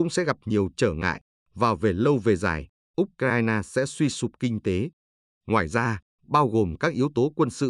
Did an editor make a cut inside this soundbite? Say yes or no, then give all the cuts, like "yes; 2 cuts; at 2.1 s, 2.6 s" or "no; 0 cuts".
yes; 1 cut; at 6.1 s